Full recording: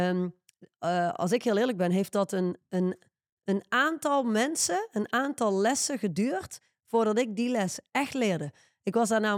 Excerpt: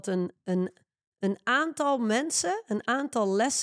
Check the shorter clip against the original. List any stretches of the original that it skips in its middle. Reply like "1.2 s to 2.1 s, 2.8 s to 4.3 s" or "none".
none